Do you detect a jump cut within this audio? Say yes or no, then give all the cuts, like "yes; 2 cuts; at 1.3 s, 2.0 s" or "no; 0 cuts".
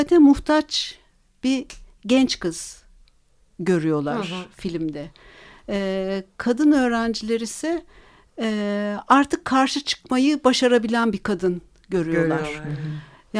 no; 0 cuts